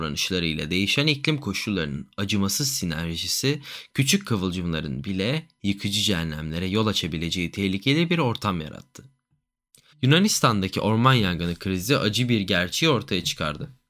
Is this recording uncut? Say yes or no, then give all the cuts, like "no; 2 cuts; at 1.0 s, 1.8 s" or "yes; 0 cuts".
no; 1 cut; at 9.9 s